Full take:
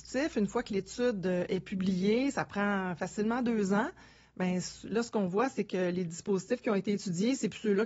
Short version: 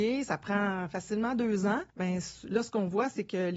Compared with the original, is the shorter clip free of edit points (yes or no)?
no